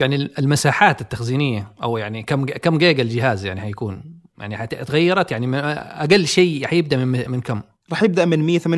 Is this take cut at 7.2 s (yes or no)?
yes